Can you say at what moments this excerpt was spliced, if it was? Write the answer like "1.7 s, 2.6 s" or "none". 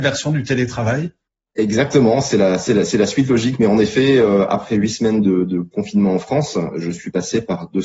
none